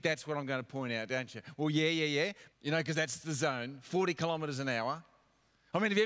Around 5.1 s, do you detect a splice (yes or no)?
no